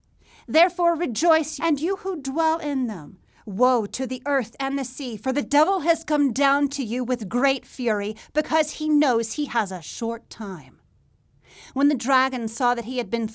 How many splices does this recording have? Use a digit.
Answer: 1